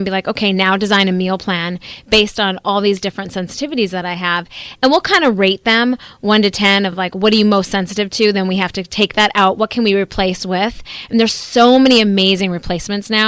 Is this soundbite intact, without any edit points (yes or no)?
yes